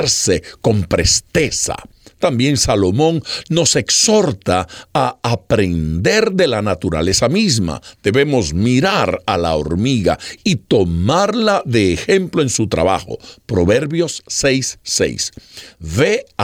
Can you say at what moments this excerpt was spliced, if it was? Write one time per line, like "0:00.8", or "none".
none

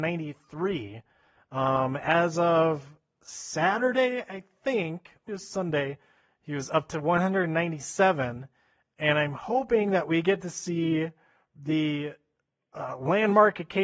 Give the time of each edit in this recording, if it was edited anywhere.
0:05.3

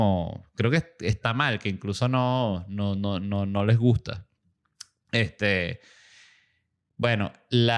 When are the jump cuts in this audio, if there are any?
none

